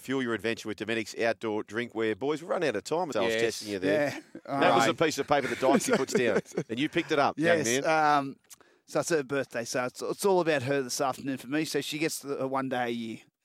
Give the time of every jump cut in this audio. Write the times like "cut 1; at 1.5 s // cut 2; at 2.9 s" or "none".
cut 1; at 3.1 s